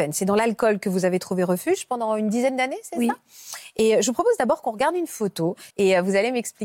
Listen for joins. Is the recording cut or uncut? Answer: cut